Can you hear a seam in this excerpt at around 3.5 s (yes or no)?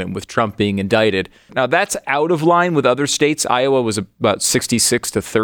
no